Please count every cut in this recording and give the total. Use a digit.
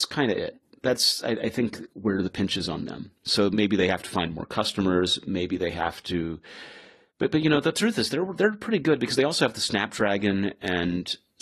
0